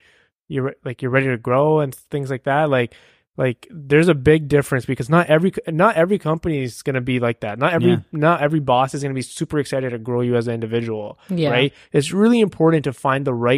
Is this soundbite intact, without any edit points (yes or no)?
yes